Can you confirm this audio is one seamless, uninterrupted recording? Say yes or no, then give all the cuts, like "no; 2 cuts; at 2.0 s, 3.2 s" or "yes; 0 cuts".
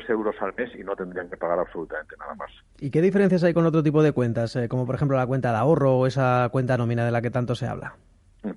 yes; 0 cuts